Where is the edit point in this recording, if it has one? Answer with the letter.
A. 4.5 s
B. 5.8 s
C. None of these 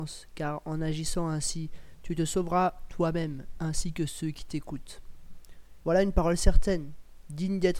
B